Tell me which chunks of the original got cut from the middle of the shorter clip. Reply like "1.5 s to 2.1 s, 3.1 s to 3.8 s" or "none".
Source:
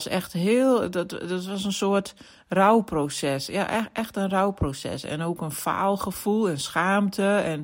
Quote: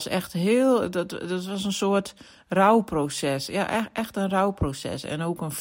none